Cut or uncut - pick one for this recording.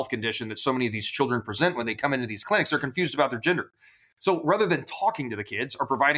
uncut